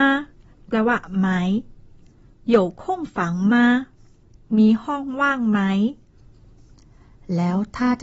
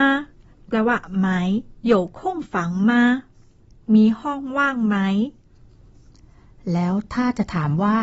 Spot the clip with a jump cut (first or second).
second